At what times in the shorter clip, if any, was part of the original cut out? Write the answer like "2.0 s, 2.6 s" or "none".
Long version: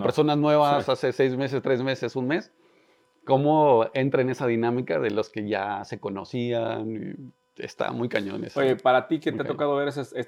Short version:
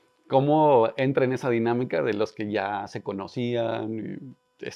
none